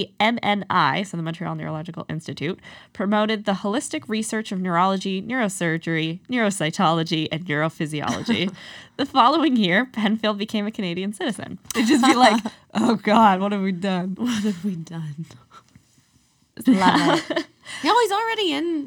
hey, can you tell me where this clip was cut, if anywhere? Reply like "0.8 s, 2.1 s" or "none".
11.7 s, 16.6 s

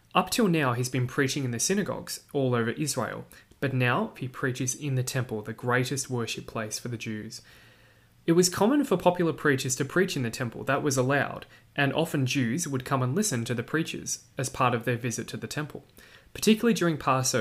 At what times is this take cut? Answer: 4.1 s

